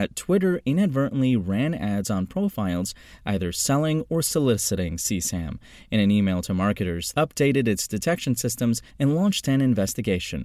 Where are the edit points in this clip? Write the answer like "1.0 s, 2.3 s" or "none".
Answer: 7.1 s, 8.9 s

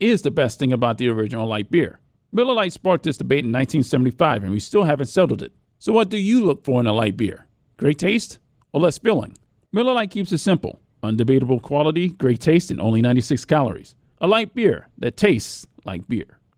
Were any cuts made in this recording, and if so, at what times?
9.7 s, 14.1 s

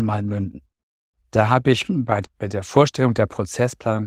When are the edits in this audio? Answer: 2.2 s

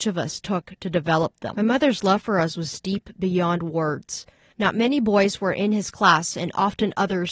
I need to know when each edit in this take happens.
4.5 s

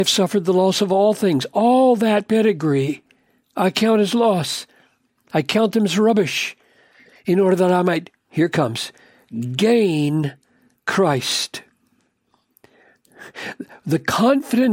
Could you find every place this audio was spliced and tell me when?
none

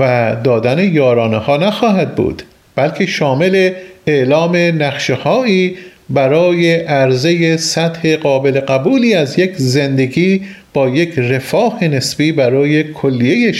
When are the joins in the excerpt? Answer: none

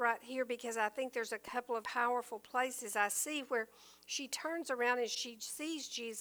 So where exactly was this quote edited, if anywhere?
1.8 s

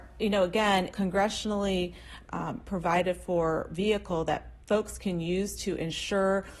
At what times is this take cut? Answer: 0.9 s

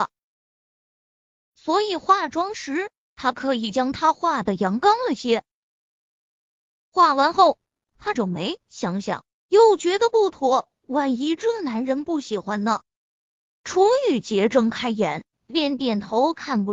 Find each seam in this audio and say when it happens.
8.1 s, 13.5 s, 15.3 s

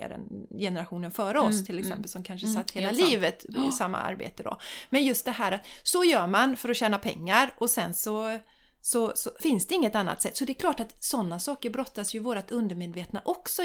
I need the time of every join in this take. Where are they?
9.4 s

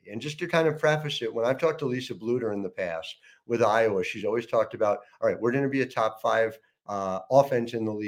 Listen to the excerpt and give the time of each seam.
none

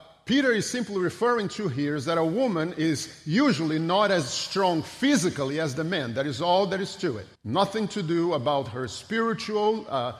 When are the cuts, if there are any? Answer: 7.3 s

